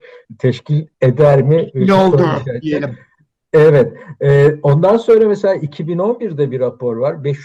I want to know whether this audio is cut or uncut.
uncut